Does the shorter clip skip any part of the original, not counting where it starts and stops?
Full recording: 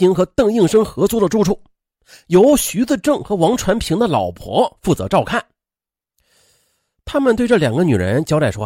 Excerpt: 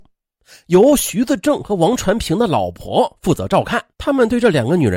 yes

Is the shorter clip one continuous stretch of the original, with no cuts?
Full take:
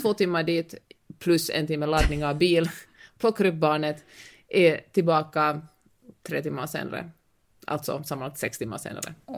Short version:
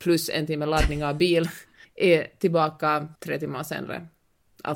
no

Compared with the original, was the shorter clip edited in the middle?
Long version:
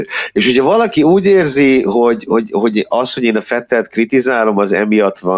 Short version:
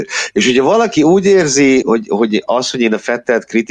yes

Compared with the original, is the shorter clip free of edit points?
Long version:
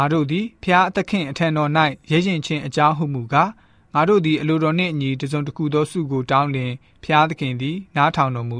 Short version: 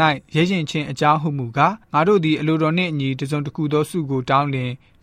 no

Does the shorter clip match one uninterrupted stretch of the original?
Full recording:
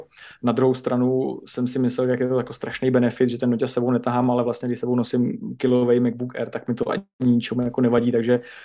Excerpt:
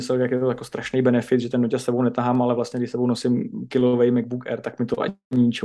yes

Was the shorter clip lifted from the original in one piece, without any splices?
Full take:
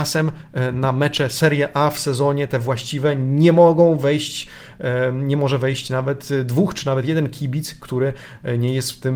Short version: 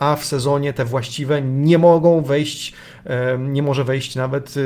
yes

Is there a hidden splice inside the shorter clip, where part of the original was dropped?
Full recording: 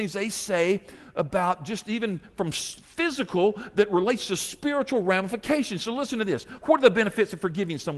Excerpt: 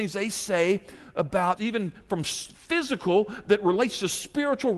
yes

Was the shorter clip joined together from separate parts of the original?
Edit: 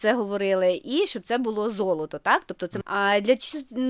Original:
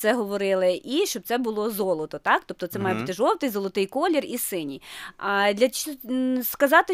yes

